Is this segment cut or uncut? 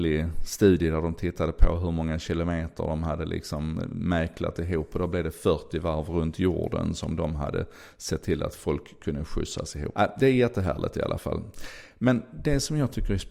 cut